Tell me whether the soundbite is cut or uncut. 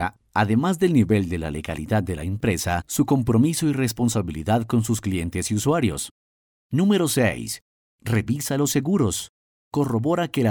cut